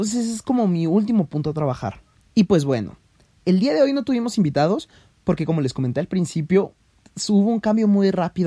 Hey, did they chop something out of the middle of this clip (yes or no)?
no